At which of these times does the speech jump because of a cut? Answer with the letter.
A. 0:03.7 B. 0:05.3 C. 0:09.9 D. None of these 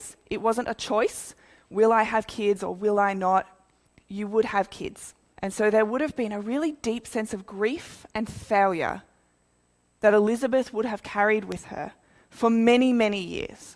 B